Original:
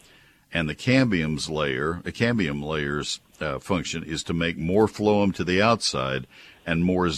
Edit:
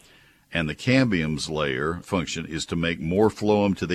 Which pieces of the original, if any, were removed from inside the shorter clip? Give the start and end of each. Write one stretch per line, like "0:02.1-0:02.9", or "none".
0:02.0-0:03.6